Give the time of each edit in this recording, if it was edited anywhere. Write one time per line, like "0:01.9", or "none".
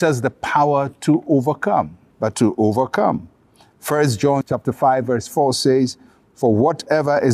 0:02.1